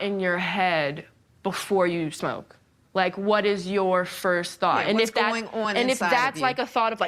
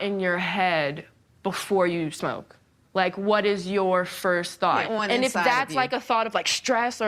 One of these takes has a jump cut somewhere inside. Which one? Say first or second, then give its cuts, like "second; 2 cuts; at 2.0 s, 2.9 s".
second; 1 cut; at 4.8 s